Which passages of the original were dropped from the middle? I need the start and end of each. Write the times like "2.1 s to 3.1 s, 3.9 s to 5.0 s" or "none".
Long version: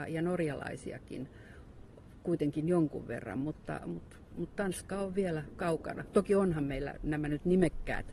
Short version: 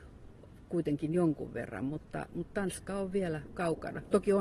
3.8 s to 4.3 s